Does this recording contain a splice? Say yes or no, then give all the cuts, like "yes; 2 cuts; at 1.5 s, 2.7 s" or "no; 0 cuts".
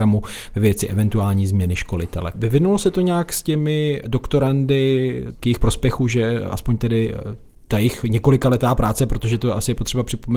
yes; 2 cuts; at 2.3 s, 5.4 s